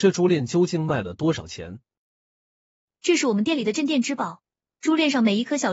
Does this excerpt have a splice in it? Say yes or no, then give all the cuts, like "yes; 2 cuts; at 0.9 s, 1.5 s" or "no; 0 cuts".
no; 0 cuts